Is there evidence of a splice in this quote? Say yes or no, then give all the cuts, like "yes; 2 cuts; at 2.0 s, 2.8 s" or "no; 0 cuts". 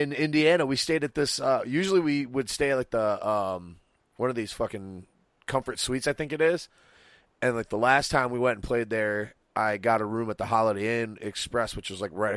no; 0 cuts